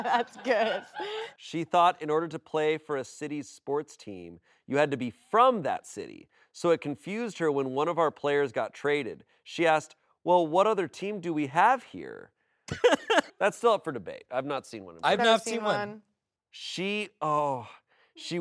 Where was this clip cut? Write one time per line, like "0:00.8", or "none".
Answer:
0:13.3